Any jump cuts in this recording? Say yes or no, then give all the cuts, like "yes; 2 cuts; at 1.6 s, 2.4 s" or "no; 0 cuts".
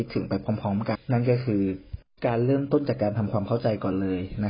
yes; 1 cut; at 0.9 s